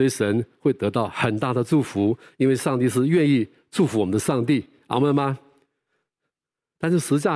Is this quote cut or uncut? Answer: uncut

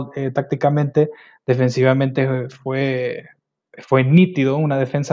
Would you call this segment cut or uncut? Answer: uncut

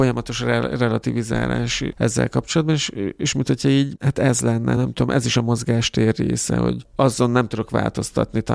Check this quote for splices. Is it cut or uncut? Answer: uncut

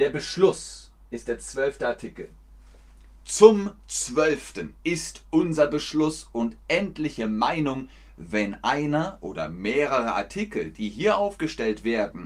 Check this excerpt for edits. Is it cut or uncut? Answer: uncut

